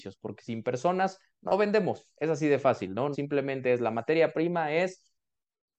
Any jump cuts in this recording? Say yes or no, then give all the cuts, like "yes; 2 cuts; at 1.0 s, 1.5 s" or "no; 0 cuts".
yes; 1 cut; at 3.1 s